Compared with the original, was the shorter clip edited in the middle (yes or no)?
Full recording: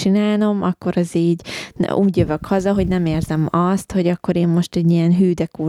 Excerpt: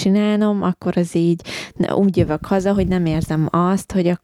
no